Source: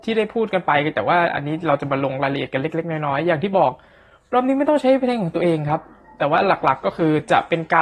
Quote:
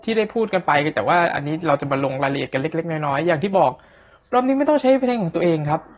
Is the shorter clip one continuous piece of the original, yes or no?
yes